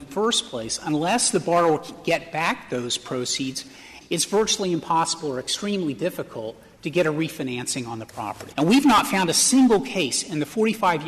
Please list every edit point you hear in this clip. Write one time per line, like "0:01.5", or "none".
0:04.0
0:08.5